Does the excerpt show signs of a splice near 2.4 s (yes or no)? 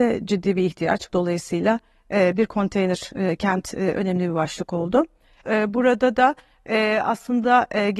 no